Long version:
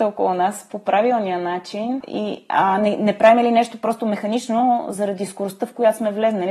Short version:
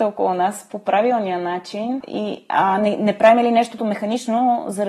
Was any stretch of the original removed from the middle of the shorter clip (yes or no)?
yes